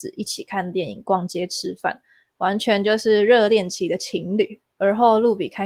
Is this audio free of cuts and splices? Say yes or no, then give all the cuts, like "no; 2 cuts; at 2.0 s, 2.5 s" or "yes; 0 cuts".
no; 1 cut; at 4.7 s